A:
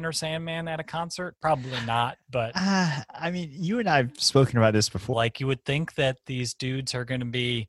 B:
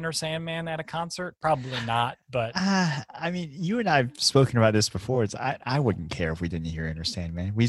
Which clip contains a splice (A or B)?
A